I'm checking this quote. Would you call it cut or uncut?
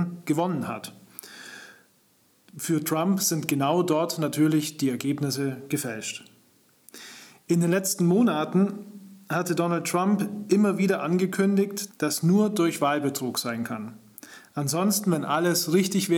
cut